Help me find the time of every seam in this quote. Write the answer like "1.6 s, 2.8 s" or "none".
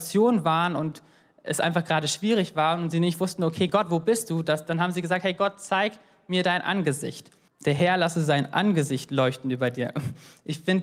7.5 s